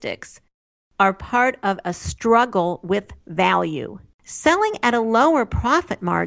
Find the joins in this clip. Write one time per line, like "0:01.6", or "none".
0:04.1